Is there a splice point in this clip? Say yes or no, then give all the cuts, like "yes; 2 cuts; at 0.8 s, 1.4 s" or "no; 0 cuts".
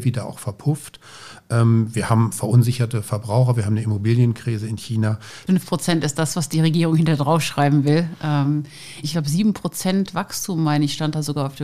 yes; 2 cuts; at 5.5 s, 9.0 s